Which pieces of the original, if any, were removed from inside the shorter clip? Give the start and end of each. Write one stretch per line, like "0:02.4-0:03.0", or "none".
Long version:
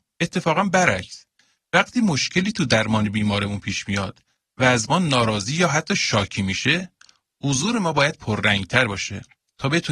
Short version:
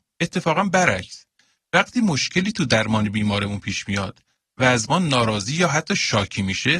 none